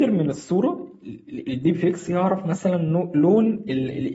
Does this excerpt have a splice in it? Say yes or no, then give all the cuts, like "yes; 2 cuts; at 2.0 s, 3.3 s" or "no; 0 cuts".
no; 0 cuts